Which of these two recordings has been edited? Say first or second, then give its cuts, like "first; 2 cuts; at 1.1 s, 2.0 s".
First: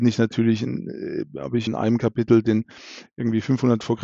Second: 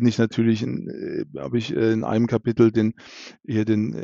first; 2 cuts; at 1.7 s, 3.1 s